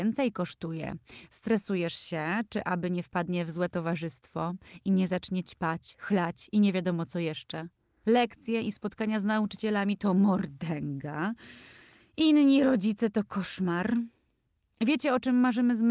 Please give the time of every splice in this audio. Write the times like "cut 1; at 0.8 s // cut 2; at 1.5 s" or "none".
none